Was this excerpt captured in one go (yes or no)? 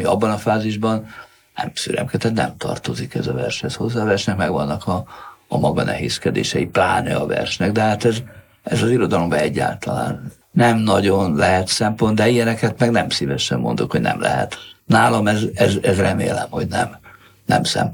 yes